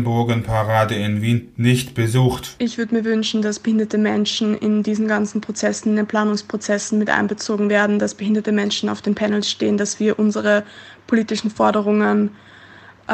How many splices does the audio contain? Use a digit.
1